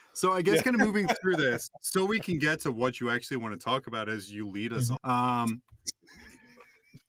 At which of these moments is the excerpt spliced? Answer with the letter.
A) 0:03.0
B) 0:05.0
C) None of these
B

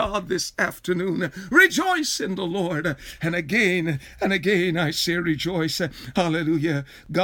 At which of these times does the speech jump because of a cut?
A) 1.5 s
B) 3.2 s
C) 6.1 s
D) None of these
D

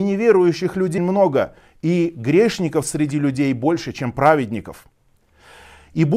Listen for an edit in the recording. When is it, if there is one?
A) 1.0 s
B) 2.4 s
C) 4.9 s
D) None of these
A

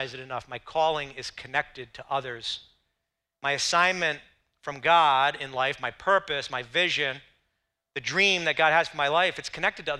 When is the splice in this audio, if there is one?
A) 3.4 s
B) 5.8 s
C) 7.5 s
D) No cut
D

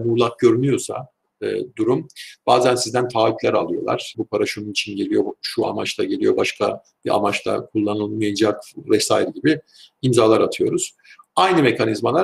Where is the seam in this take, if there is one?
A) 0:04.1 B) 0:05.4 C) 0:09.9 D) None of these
A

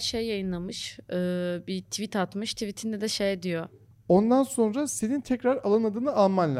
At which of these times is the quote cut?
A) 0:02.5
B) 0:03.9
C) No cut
B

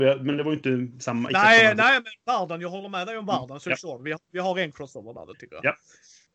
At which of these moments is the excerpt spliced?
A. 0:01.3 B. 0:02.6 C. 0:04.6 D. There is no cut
D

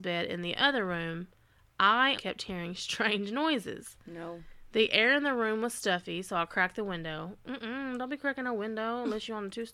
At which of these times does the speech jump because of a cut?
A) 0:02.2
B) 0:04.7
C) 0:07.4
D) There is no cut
A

